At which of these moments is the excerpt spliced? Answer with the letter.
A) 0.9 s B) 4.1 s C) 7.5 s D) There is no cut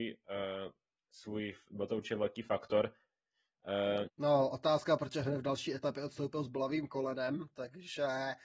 B